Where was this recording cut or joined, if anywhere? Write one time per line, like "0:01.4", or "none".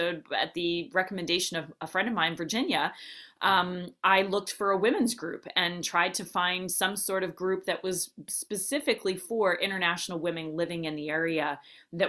none